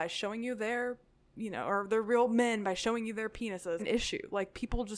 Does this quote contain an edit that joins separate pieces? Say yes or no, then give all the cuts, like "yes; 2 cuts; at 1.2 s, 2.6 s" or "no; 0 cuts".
yes; 1 cut; at 3.8 s